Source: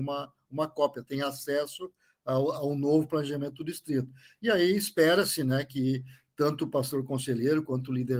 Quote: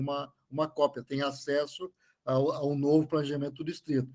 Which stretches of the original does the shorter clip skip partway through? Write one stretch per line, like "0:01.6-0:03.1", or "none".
none